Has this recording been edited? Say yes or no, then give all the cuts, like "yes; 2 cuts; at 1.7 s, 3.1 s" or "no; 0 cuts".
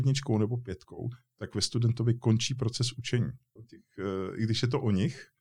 yes; 1 cut; at 3.6 s